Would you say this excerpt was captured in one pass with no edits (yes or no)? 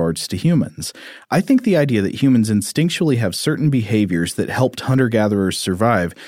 yes